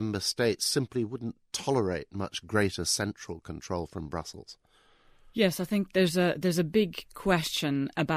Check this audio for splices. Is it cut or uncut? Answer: uncut